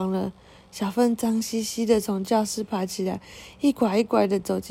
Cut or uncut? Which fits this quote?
uncut